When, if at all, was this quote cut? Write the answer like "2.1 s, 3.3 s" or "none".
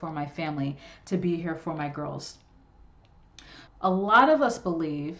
3.7 s